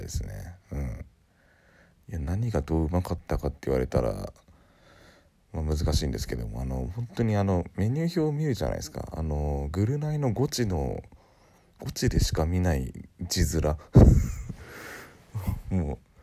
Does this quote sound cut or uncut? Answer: uncut